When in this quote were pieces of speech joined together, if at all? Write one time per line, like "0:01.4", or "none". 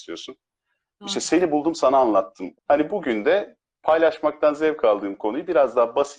0:02.5

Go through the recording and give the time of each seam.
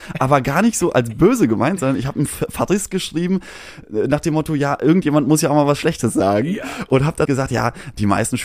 0:07.3

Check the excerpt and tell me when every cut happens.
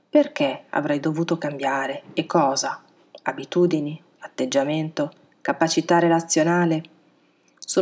none

